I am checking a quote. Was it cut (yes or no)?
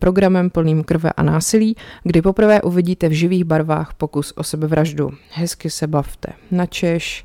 no